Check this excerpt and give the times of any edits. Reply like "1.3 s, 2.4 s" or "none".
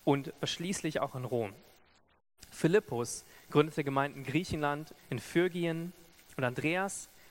5.0 s